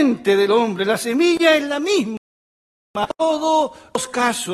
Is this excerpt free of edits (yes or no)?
yes